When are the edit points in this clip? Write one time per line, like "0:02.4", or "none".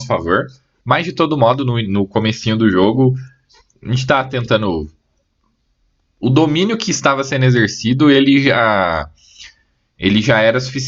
none